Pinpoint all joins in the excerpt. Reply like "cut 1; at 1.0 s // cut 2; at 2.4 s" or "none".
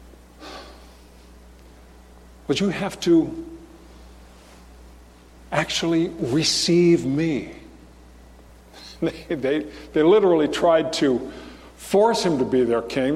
cut 1; at 8.5 s

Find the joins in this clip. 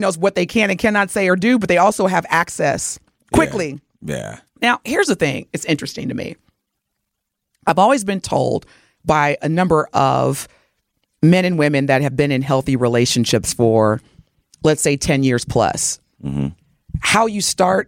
none

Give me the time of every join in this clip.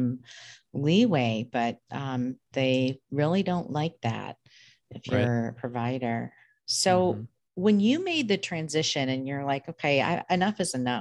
none

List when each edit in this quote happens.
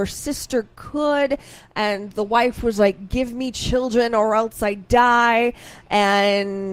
none

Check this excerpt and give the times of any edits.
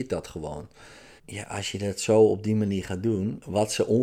cut 1; at 1.2 s

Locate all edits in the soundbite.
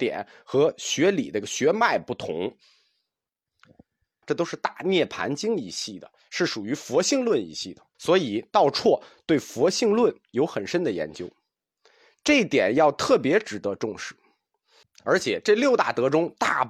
cut 1; at 4.2 s // cut 2; at 7.9 s // cut 3; at 14.8 s

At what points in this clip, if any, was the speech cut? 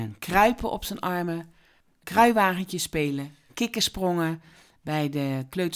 none

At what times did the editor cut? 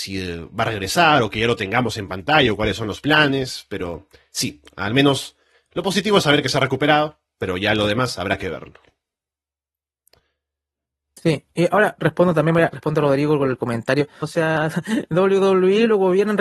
cut 1; at 12.7 s // cut 2; at 14.2 s

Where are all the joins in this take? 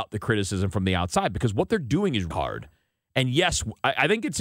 cut 1; at 2.3 s

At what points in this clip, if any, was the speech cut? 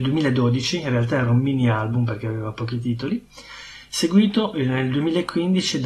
none

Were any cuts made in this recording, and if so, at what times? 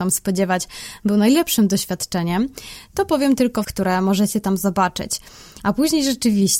cut 1; at 3.6 s // cut 2; at 5.6 s

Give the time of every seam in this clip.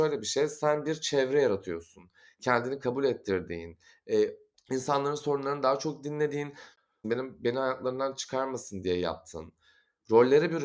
cut 1; at 4.5 s // cut 2; at 7.0 s

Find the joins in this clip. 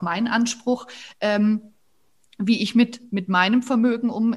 none

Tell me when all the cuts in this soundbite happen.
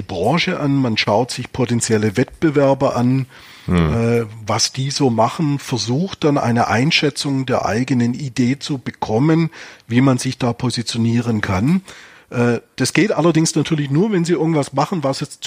none

